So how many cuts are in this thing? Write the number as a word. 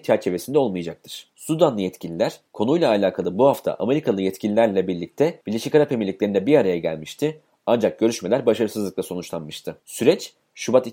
one